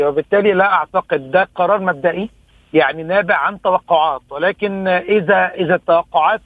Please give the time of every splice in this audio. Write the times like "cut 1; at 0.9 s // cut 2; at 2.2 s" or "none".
cut 1; at 5.5 s

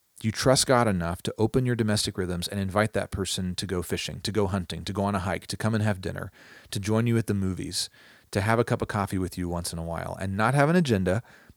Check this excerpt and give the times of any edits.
none

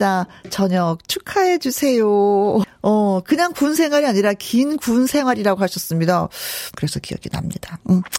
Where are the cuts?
cut 1; at 2.6 s // cut 2; at 6.7 s

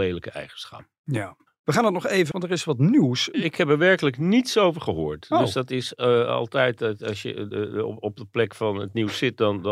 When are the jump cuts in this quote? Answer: cut 1; at 2.3 s // cut 2; at 3.3 s

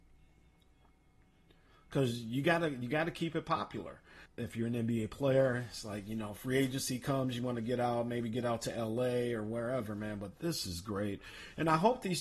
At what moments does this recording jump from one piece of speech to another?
cut 1; at 4.3 s

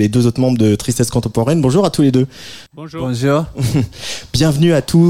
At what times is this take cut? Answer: cut 1; at 2.7 s

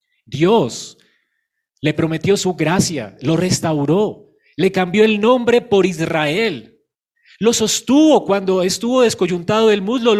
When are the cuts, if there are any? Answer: none

